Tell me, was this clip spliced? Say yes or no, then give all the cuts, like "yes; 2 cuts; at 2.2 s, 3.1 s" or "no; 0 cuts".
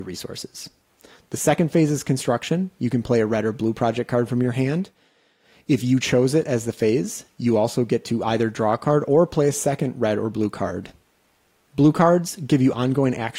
no; 0 cuts